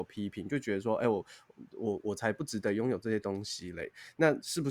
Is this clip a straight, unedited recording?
yes; 0 cuts

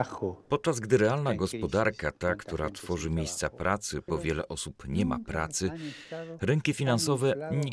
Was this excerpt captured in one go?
no; 1 cut; at 4.1 s

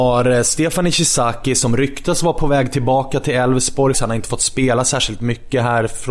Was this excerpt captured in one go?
no; 1 cut; at 3.9 s

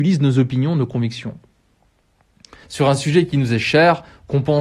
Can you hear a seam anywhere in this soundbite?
yes; 1 cut; at 2.6 s

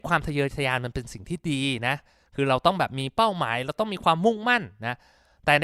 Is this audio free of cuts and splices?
yes; 0 cuts

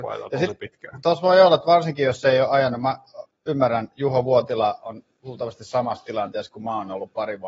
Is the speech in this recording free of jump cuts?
yes; 0 cuts

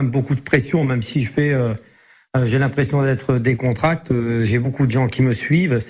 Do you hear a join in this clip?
no; 0 cuts

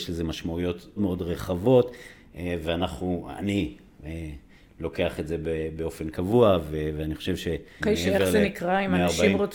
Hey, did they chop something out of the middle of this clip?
yes; 2 cuts; at 1.0 s, 7.8 s

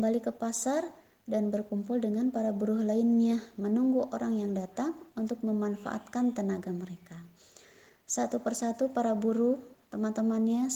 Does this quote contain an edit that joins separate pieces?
no; 0 cuts

